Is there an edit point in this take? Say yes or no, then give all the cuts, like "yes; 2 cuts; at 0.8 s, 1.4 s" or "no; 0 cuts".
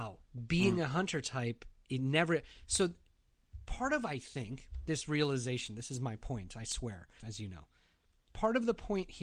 yes; 1 cut; at 7.2 s